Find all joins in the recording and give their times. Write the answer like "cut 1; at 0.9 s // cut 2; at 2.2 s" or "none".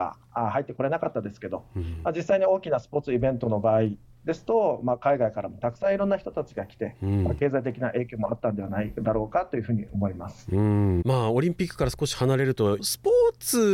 cut 1; at 11.0 s // cut 2; at 12.8 s